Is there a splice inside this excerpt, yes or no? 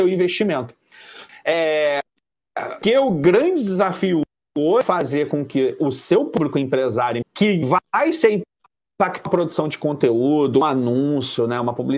yes